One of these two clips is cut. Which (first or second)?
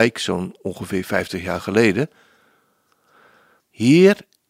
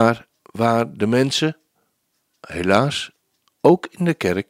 first